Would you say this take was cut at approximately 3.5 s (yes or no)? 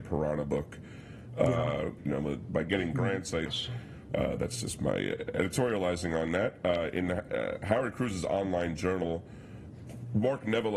yes